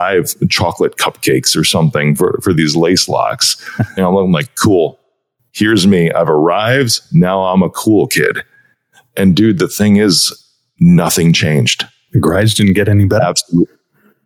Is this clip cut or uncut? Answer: cut